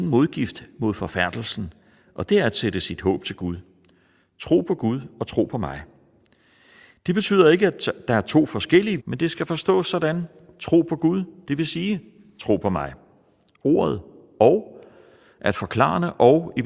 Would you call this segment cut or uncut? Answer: cut